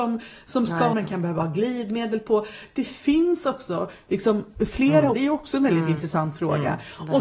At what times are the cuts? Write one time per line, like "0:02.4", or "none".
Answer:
0:00.9
0:05.1